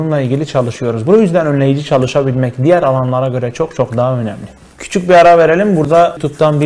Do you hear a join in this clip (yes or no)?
no